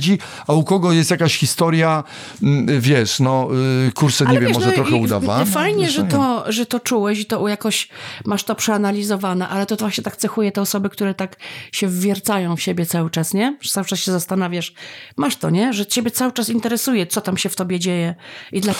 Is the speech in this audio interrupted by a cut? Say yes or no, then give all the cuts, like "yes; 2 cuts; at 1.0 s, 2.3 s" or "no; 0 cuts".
no; 0 cuts